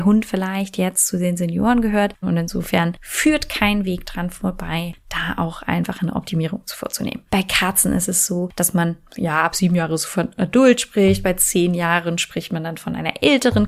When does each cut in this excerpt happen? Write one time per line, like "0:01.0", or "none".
0:02.2
0:07.3